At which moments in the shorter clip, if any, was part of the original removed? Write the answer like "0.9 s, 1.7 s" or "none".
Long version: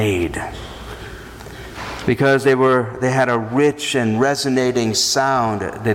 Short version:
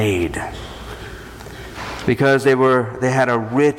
none